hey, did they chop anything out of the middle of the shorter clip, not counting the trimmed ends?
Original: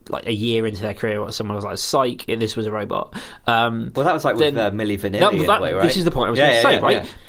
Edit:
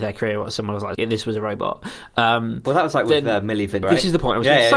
yes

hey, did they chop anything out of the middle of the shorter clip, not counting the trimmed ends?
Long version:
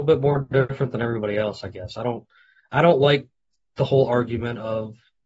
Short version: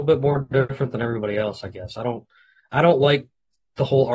no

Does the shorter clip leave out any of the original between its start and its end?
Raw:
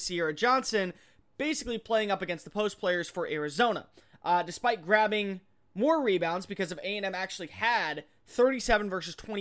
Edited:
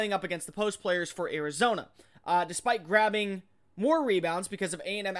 no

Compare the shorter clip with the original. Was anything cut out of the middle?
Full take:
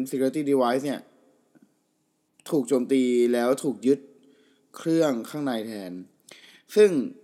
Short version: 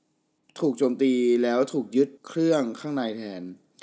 yes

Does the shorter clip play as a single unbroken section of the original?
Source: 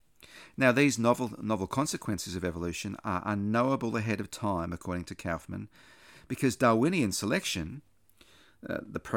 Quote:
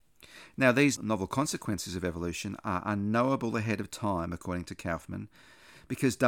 no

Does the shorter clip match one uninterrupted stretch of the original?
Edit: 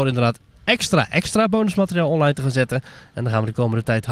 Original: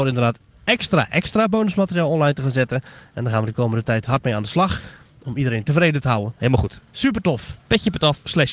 yes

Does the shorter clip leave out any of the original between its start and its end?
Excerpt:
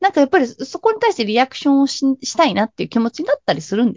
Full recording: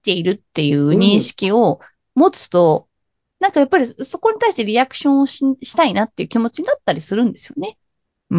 no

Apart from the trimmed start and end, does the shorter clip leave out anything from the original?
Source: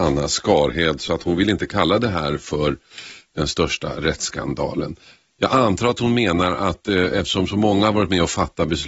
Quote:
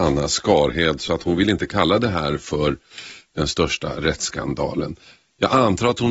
no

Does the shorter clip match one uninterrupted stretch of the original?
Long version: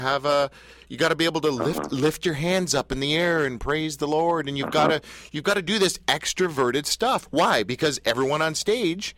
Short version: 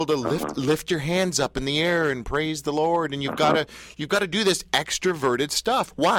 yes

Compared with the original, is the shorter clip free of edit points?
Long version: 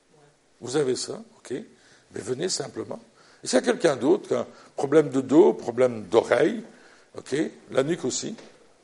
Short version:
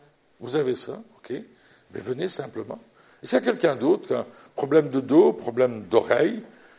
yes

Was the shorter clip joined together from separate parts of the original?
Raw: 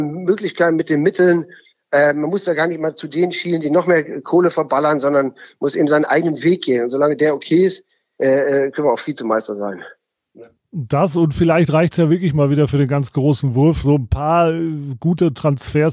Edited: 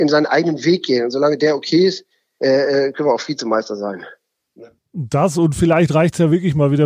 no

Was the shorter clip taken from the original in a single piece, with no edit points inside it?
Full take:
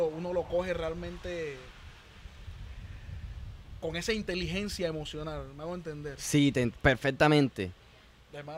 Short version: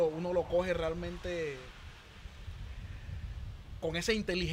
yes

